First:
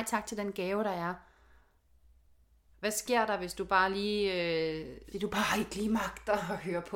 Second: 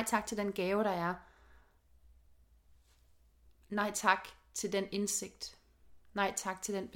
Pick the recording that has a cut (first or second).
first